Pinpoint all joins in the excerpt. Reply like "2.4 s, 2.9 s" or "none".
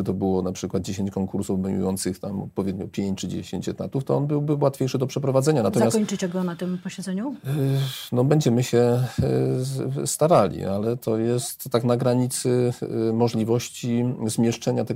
none